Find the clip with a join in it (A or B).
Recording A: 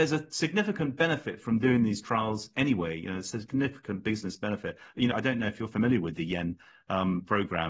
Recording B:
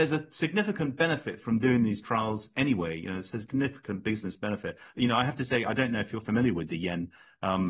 A